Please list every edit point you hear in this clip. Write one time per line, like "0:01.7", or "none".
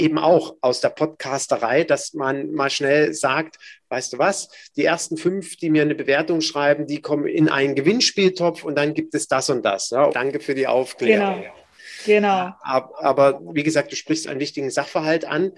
0:10.1

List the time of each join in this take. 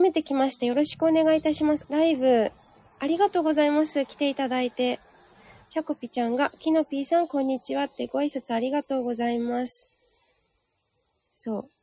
0:01.8

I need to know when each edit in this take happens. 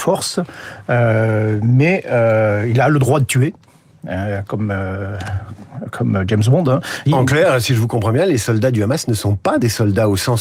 0:07.1

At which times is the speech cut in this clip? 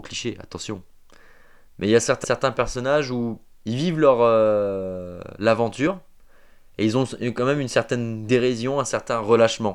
0:02.2

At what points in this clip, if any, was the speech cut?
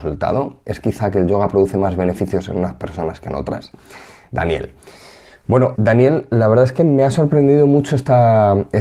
0:05.7

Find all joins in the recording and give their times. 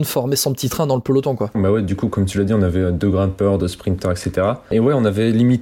0:01.5

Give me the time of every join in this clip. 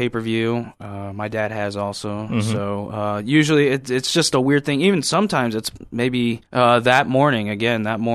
0:06.5

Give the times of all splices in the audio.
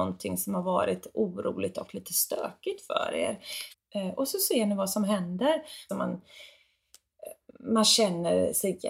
0:03.7
0:05.9

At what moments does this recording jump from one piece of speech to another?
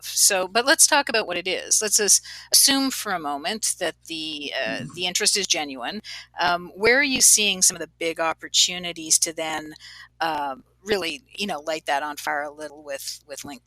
none

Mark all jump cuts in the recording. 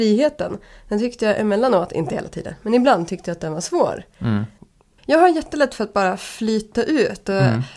0:05.0

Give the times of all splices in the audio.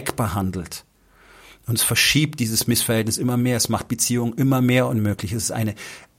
none

